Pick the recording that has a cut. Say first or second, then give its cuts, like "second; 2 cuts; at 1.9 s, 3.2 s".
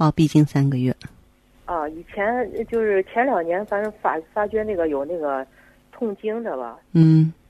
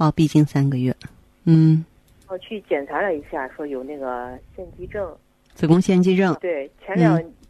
second; 2 cuts; at 1.4 s, 6.4 s